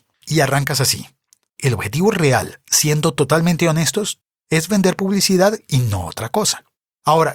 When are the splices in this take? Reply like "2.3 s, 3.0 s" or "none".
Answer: 1.5 s